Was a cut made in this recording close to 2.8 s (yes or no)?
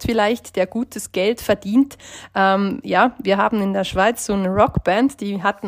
no